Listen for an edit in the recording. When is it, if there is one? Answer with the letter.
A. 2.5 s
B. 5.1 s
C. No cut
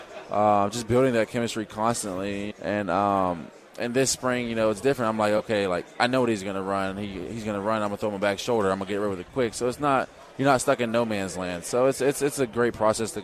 A